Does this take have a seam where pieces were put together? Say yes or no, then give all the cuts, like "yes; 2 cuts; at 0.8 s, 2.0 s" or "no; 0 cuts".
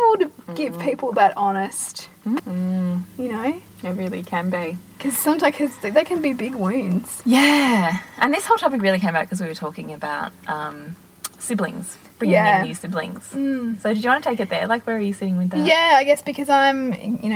yes; 1 cut; at 2.4 s